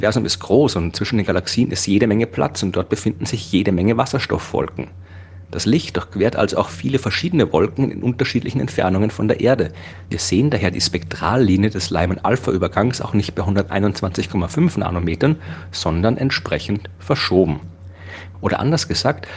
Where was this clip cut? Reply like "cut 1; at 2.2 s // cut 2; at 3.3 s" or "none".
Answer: cut 1; at 10.1 s // cut 2; at 18.3 s